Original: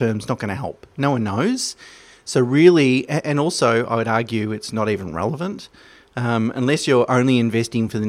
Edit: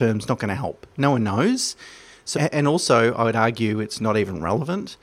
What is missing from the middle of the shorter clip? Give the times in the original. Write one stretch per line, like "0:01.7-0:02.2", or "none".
0:02.3-0:03.1

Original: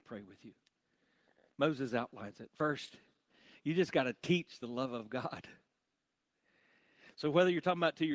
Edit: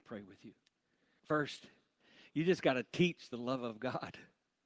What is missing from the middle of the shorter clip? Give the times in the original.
0:01.2-0:02.5

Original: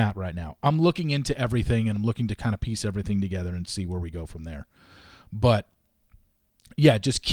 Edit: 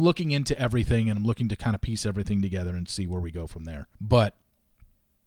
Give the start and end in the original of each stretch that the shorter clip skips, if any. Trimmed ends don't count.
0:04.7-0:05.3

